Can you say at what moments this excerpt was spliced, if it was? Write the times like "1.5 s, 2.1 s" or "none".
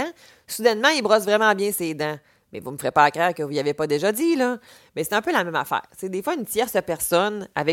none